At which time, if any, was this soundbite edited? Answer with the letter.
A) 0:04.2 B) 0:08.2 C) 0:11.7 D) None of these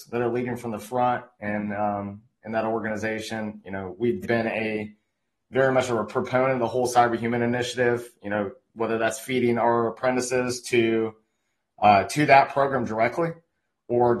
A